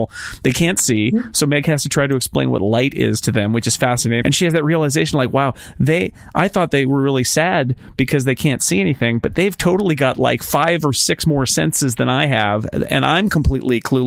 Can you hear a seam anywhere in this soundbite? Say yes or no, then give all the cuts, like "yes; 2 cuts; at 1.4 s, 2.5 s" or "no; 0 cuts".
yes; 1 cut; at 4.2 s